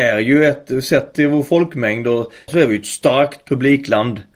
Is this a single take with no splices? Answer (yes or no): no